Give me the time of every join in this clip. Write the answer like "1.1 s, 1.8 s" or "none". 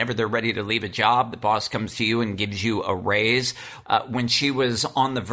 3.8 s